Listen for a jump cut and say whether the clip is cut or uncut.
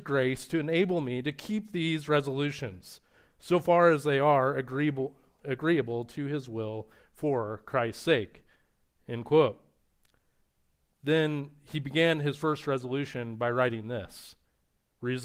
uncut